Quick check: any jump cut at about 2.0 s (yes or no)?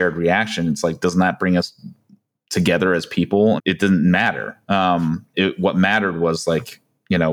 no